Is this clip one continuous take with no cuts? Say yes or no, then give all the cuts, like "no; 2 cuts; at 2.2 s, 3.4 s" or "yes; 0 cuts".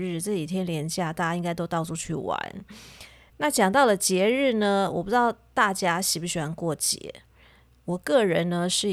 yes; 0 cuts